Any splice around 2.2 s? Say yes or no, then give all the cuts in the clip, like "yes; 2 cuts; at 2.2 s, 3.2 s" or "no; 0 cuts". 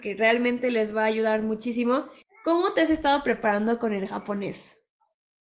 yes; 1 cut; at 2.2 s